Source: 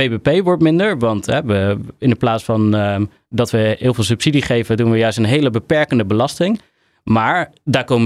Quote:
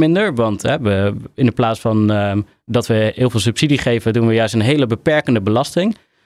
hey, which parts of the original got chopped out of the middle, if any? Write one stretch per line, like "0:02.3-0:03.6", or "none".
none